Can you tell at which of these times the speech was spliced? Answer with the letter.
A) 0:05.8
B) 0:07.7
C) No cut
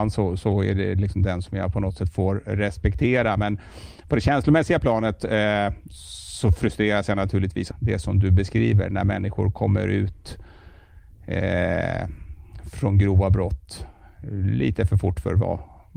B